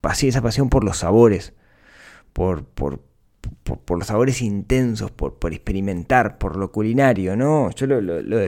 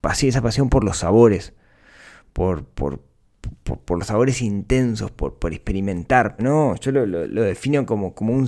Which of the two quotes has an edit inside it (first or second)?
second